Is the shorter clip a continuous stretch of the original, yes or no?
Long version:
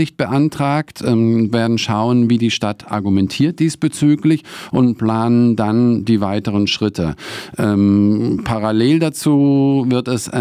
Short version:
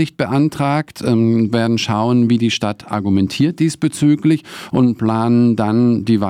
yes